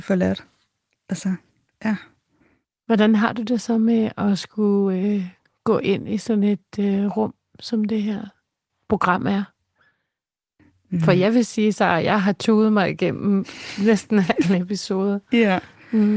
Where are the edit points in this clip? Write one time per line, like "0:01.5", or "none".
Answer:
none